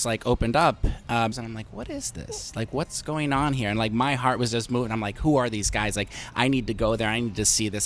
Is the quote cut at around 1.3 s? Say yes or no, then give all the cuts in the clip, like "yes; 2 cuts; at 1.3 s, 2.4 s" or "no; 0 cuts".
yes; 1 cut; at 1.3 s